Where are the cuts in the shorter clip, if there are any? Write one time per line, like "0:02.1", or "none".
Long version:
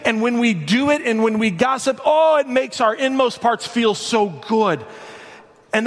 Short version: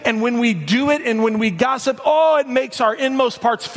none